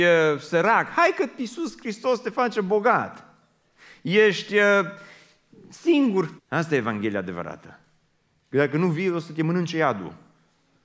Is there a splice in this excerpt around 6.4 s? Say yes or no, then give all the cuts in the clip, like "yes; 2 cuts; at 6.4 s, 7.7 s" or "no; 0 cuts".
yes; 1 cut; at 6.4 s